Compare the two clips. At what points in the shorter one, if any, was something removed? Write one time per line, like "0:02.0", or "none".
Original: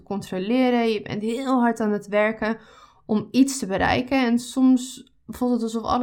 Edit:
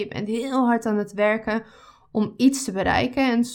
none